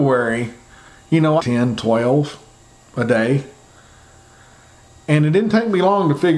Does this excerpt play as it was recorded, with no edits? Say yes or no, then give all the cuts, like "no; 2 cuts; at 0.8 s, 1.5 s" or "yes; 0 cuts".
no; 1 cut; at 1.4 s